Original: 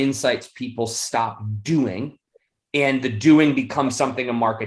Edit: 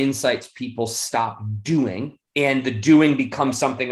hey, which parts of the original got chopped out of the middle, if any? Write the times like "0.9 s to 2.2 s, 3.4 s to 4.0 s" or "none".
2.3 s to 2.7 s